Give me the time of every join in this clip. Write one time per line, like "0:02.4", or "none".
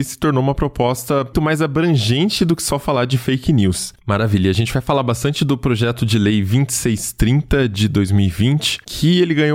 0:01.3
0:04.0